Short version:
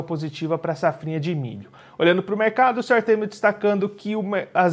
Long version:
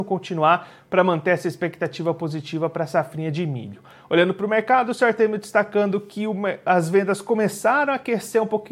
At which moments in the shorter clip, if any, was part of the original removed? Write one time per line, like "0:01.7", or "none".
none